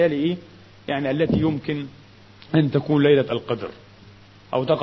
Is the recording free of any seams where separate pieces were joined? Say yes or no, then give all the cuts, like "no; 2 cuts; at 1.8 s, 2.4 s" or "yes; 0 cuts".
yes; 0 cuts